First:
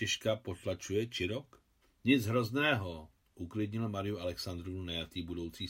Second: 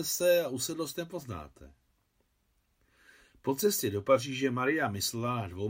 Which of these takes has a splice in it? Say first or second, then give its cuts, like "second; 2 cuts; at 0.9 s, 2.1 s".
first; 1 cut; at 1.8 s